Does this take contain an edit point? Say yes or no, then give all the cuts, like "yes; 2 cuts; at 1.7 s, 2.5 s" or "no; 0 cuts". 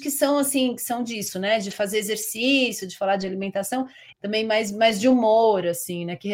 yes; 1 cut; at 4.1 s